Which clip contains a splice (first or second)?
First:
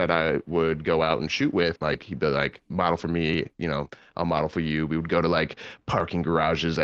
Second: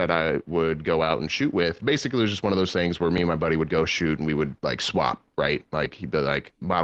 first